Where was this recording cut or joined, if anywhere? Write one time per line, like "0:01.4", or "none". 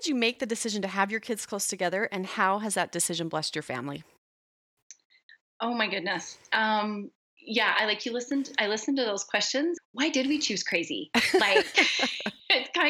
0:09.8

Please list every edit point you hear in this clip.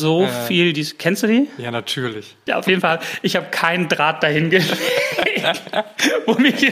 0:02.5

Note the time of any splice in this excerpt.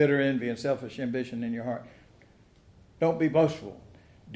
none

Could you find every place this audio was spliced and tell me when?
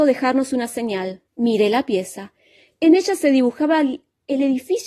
0:01.3

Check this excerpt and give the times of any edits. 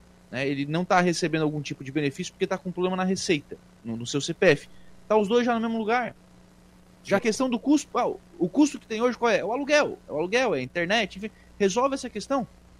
0:07.2

